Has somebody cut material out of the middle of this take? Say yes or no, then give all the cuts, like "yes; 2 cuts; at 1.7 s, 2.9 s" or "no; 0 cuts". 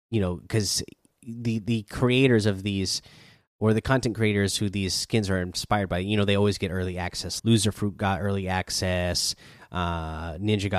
yes; 1 cut; at 7.4 s